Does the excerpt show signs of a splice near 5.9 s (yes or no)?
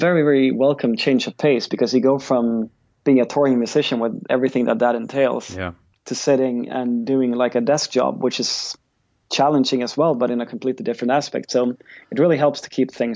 no